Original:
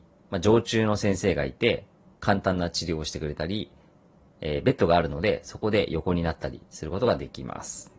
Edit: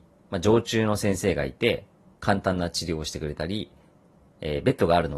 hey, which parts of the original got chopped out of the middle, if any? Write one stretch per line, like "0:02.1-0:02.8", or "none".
none